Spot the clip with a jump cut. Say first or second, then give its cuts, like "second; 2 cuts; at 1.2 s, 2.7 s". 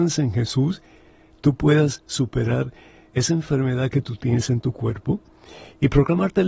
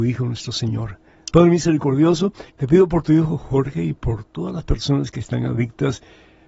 second; 2 cuts; at 1.3 s, 2.5 s